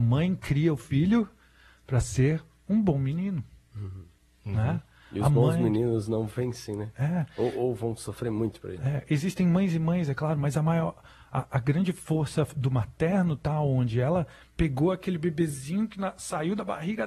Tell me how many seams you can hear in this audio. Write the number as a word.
zero